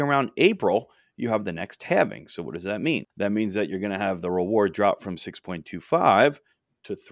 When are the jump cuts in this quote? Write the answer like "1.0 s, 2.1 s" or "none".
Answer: 3.1 s